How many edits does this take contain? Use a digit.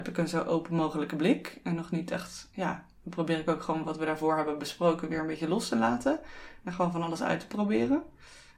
0